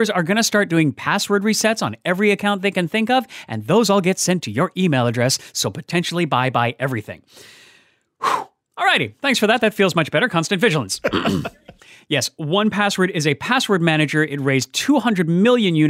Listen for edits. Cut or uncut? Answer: uncut